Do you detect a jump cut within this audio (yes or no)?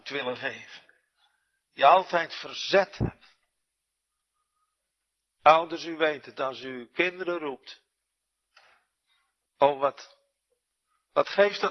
yes